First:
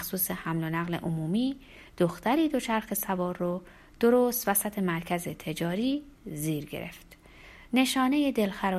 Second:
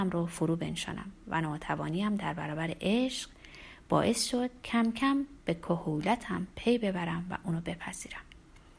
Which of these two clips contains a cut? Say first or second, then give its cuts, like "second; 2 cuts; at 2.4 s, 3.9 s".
first; 1 cut; at 7.7 s